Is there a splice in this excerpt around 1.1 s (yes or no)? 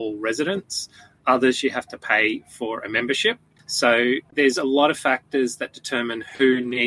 no